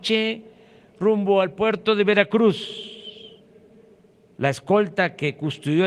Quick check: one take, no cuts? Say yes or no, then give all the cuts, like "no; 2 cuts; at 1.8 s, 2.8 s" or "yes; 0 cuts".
yes; 0 cuts